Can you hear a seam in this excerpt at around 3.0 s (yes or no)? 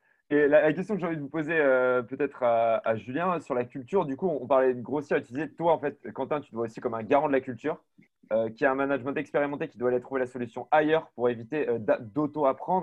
no